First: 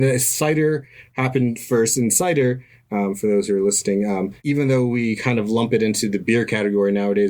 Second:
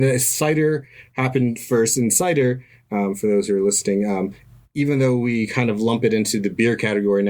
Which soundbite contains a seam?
first; 1 cut; at 4.4 s

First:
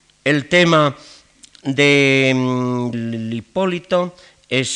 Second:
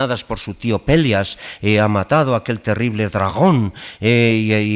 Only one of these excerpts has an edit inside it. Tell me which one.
first; 1 cut; at 2.9 s

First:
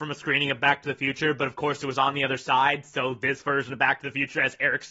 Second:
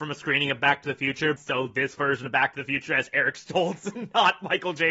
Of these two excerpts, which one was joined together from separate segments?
second; 1 cut; at 1.4 s

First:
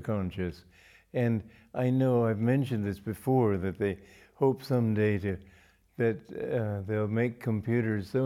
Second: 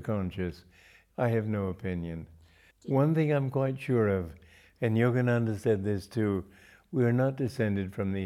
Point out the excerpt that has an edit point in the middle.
second; 2 cuts; at 1.1 s, 2.7 s

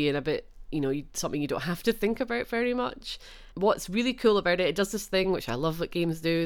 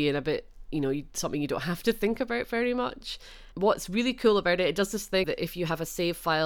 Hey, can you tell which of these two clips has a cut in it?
second; 1 cut; at 5.2 s

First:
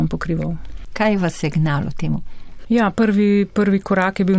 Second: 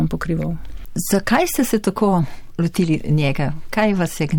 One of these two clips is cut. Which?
first; 1 cut; at 0.9 s

